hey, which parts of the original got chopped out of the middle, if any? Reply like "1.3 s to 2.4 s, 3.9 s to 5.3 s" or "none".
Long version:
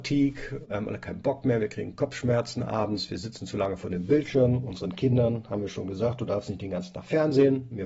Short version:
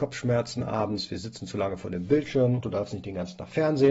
4.6 s to 6.2 s